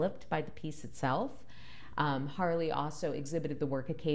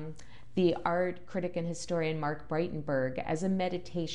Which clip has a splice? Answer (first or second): first